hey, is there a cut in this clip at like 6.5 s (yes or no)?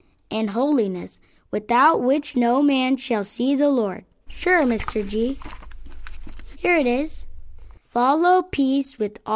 yes